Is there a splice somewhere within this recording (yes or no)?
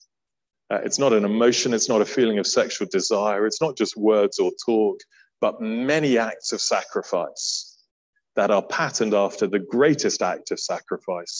no